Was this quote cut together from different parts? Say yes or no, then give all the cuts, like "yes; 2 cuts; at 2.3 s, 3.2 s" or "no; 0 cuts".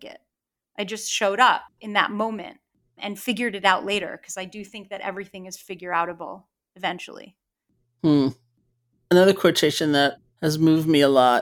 no; 0 cuts